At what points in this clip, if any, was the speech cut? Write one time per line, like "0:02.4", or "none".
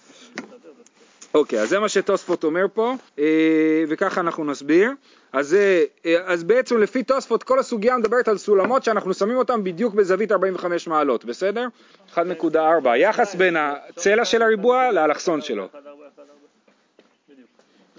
0:03.1
0:11.9